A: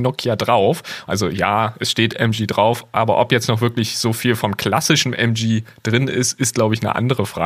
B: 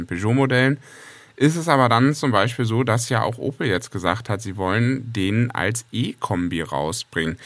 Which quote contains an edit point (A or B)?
A